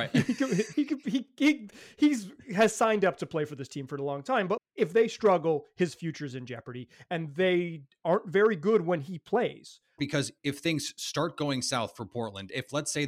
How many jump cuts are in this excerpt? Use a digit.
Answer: 2